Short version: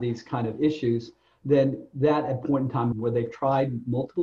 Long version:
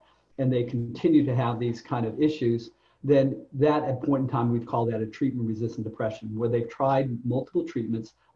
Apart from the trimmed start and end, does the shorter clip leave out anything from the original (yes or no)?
yes